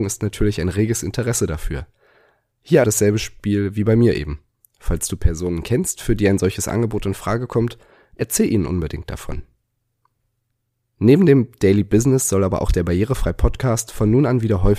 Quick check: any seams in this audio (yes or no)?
yes